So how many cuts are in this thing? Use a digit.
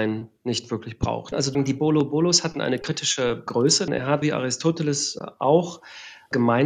2